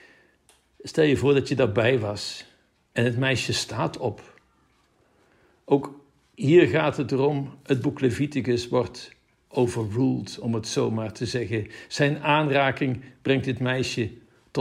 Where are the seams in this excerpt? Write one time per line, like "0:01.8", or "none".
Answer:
none